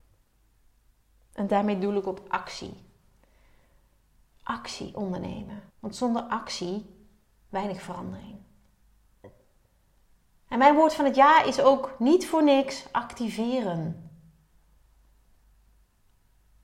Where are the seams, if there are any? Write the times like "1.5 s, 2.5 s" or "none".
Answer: 5.7 s